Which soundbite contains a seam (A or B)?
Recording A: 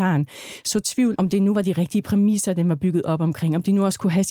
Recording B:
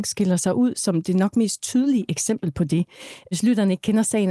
A